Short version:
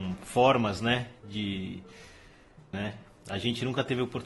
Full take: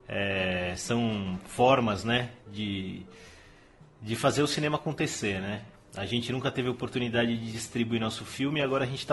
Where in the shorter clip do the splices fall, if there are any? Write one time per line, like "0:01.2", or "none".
0:02.7